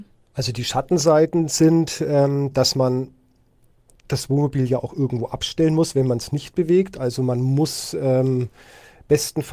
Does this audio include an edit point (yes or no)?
no